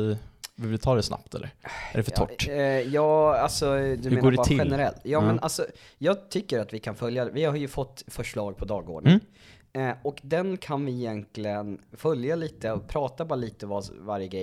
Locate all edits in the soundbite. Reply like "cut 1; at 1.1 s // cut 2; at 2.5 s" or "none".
none